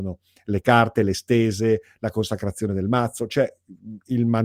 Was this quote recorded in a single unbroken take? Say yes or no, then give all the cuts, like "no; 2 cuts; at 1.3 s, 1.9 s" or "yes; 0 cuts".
yes; 0 cuts